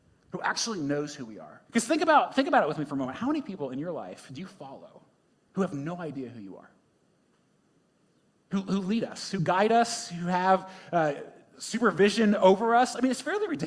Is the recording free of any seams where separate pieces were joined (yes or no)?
no